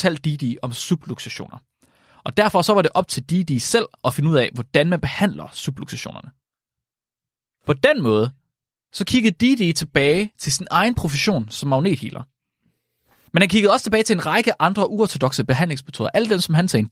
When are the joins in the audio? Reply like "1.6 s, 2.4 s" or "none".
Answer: none